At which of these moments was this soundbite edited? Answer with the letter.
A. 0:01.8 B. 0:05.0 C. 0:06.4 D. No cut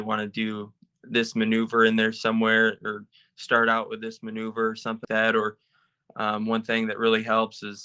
B